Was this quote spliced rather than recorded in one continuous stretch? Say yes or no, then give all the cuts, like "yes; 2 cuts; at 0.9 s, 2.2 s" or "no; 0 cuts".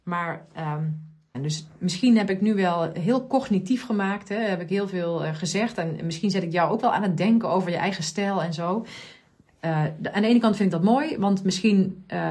yes; 1 cut; at 1.3 s